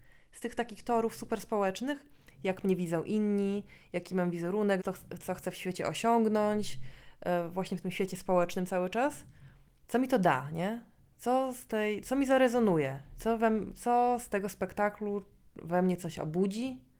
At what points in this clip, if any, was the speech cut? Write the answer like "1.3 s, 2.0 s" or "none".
4.8 s, 9.8 s